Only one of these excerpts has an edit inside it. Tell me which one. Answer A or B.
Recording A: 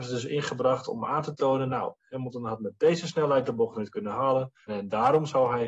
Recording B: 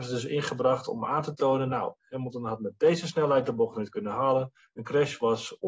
A